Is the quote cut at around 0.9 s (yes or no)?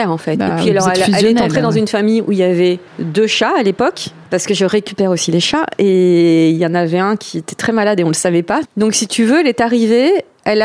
no